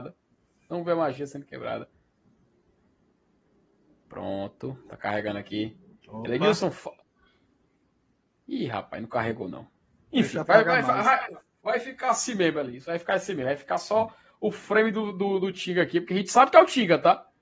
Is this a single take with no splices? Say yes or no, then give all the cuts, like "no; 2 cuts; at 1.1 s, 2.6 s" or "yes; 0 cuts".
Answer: yes; 0 cuts